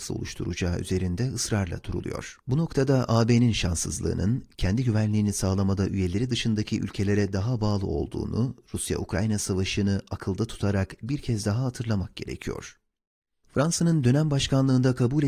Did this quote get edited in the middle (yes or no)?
yes